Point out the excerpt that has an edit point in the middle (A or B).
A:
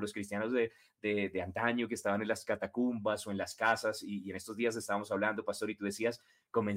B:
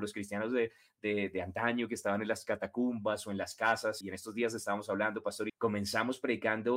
B